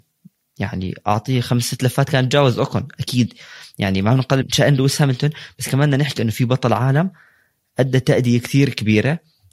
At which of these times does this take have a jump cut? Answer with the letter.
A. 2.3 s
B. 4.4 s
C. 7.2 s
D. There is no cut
B